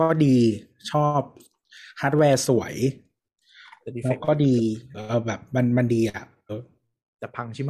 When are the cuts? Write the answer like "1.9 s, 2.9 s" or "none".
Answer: 4.9 s, 6.5 s